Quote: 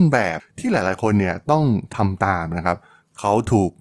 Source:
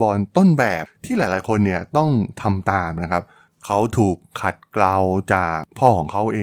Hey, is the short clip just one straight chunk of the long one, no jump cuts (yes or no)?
yes